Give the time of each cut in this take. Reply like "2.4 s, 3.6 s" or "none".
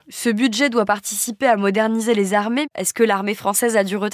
none